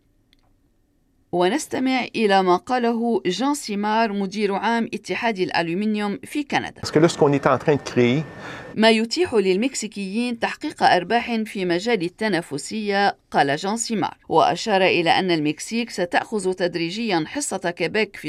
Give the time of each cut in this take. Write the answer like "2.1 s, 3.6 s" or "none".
8.7 s, 14.2 s